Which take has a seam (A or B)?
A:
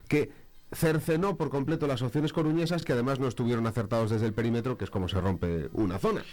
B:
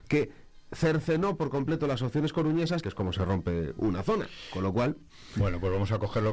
B